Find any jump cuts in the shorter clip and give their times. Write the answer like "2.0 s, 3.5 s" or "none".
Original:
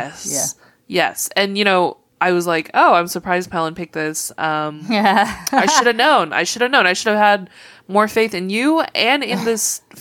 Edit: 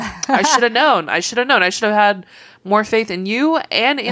none